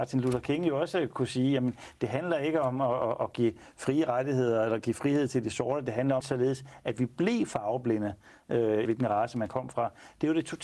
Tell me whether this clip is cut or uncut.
cut